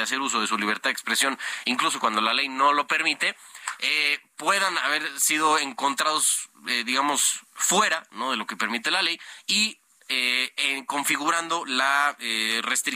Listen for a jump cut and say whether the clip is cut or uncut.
uncut